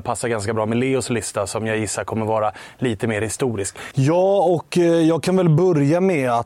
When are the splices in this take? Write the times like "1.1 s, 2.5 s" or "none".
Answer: 3.9 s